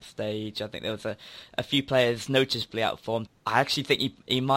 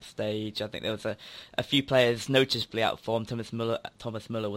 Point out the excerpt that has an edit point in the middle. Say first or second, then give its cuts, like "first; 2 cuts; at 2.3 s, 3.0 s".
first; 1 cut; at 3.3 s